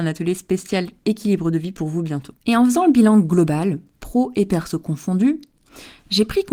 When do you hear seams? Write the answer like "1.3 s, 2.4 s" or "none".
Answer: 2.4 s